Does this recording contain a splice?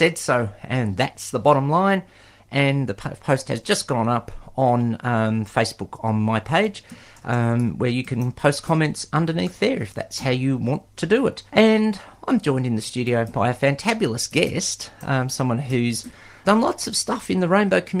yes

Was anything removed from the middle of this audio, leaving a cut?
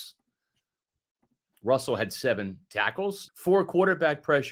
yes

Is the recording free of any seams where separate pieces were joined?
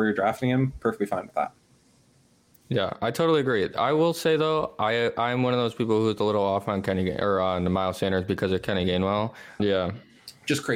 no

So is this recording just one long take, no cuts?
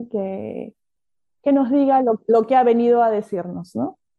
yes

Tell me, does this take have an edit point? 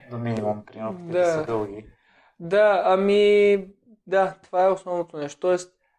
no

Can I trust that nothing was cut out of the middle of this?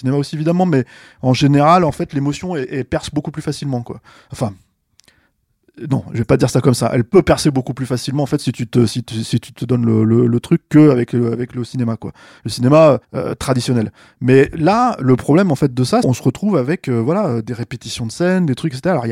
no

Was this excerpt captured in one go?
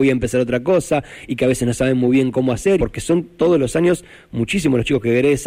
no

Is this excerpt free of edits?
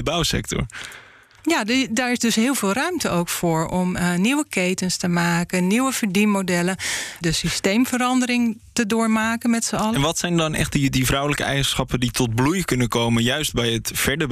no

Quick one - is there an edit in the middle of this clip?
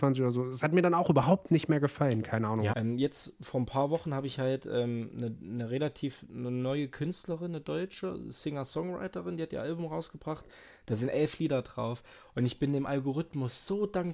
yes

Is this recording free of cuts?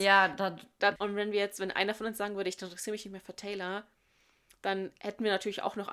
no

